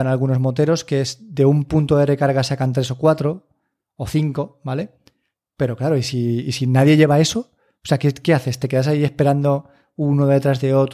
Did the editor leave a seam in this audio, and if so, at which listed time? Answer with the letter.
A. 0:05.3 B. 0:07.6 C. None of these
C